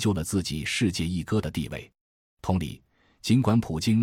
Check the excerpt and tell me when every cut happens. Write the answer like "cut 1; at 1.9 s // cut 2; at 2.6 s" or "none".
cut 1; at 2.3 s

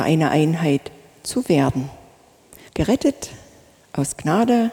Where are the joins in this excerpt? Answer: cut 1; at 2.7 s

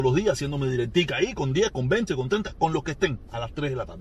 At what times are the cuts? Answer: cut 1; at 2.1 s

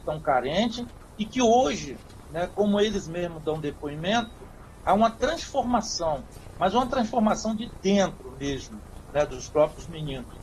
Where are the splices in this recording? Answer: none

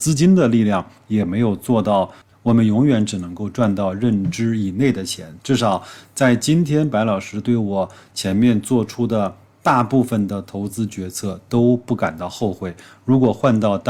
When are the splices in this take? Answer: cut 1; at 2.3 s

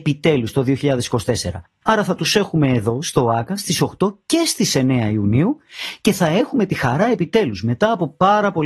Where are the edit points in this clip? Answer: cut 1; at 1.8 s

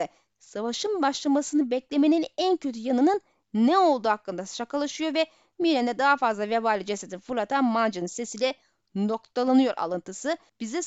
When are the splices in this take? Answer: none

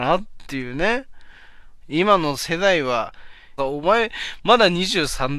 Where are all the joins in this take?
cut 1; at 1.8 s // cut 2; at 3.6 s

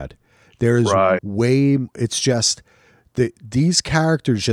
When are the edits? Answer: cut 1; at 1.2 s

